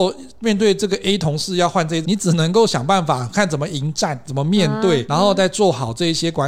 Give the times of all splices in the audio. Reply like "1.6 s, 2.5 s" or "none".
2.0 s, 5.1 s